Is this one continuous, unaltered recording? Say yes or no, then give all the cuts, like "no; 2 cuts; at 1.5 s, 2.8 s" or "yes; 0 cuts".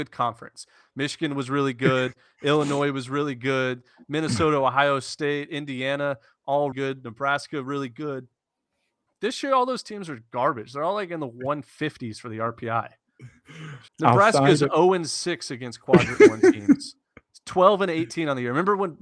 no; 2 cuts; at 6.7 s, 13.9 s